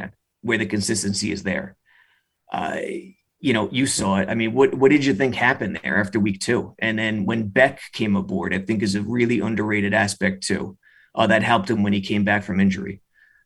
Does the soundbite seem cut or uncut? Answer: uncut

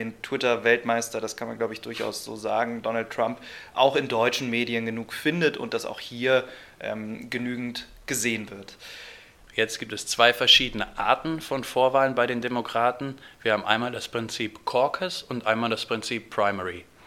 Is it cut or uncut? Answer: cut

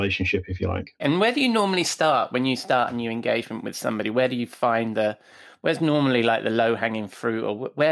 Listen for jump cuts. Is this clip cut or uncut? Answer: cut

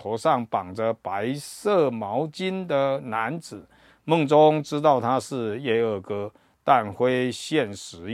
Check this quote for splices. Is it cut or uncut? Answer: uncut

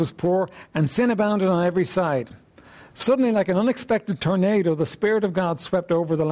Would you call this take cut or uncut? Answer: uncut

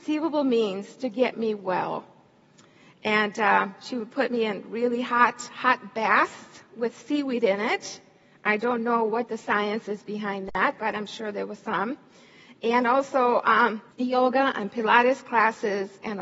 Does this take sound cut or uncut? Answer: cut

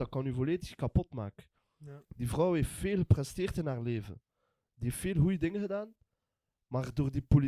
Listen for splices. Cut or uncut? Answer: cut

